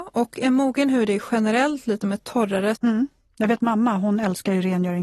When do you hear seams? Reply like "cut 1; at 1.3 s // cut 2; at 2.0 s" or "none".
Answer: cut 1; at 2.8 s